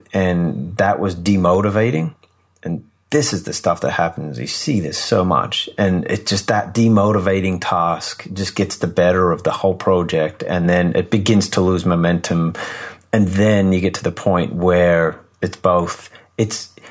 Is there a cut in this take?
no; 0 cuts

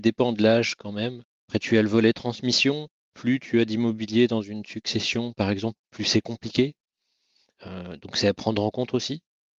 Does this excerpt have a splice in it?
no; 0 cuts

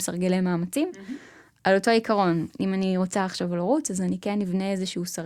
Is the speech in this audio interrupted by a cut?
no; 0 cuts

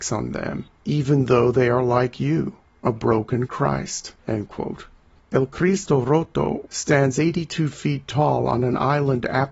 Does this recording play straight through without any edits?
no; 2 cuts; at 4.2 s, 6.6 s

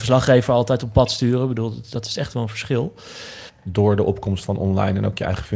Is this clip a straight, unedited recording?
no; 1 cut; at 3.5 s

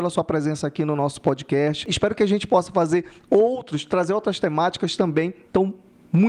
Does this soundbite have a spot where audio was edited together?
no; 0 cuts

